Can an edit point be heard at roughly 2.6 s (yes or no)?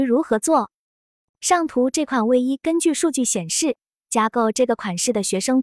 no